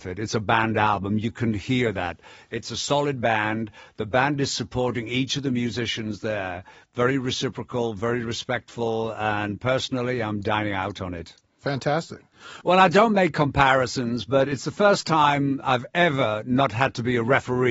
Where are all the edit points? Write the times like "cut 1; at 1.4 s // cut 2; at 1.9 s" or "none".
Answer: cut 1; at 12.6 s